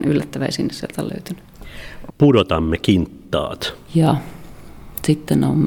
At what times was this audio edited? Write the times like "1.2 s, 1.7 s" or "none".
2.1 s, 3.9 s